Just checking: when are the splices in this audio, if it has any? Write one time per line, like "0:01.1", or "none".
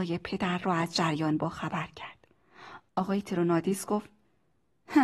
0:02.9